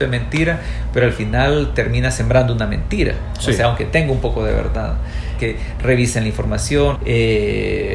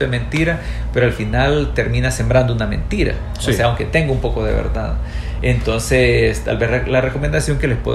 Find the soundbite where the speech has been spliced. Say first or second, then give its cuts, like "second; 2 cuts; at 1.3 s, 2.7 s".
first; 2 cuts; at 5.4 s, 7.0 s